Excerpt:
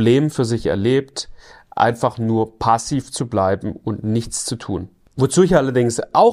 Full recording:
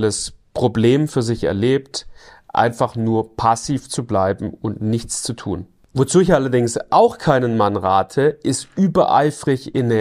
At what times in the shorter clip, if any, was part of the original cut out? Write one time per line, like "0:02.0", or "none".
none